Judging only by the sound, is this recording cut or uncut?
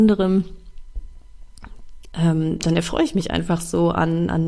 uncut